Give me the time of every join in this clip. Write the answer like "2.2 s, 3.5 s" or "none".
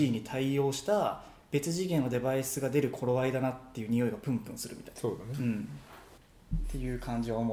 none